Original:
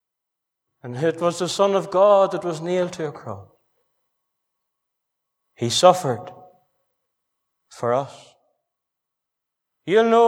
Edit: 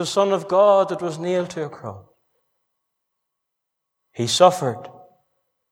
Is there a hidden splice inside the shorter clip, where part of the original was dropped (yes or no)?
no